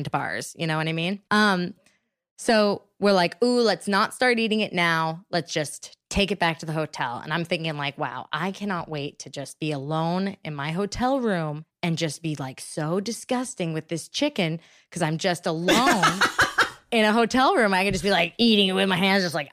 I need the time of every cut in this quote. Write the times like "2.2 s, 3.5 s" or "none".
1.3 s